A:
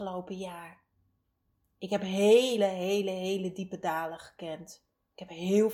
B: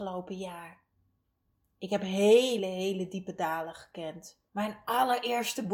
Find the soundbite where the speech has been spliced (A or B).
B